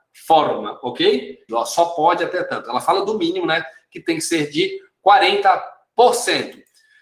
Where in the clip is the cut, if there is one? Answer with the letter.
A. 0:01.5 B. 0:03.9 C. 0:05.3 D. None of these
A